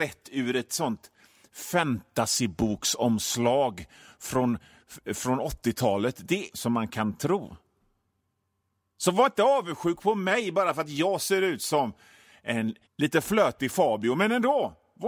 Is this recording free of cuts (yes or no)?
no